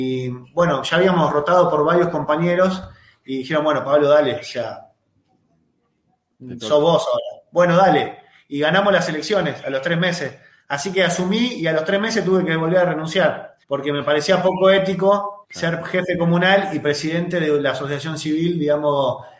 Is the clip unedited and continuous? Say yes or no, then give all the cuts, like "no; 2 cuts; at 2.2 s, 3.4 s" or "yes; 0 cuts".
no; 2 cuts; at 13.6 s, 15.4 s